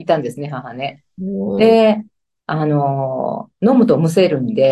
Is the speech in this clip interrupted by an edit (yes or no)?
no